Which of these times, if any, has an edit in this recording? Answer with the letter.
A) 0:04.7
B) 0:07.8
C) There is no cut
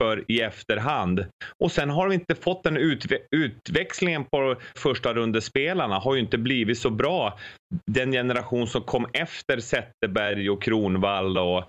A